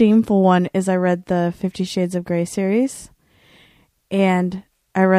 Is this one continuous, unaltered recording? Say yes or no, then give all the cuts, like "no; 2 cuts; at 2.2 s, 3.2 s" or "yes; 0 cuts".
yes; 0 cuts